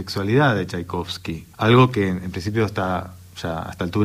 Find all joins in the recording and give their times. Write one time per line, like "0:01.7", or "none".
0:01.5